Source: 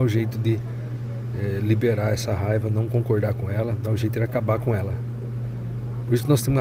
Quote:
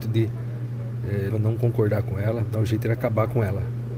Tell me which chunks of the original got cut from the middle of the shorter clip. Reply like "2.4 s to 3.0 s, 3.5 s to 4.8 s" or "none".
1.6 s to 2.6 s